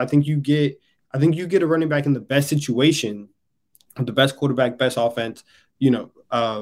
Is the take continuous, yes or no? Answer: yes